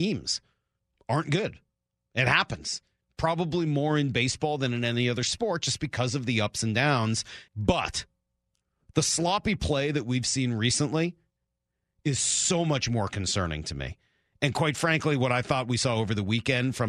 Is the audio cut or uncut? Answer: cut